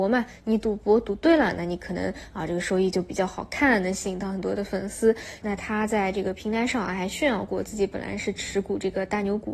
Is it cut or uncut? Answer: cut